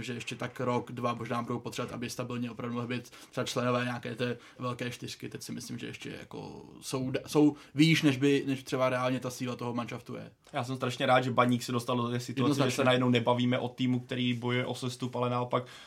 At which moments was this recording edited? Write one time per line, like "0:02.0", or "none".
0:04.6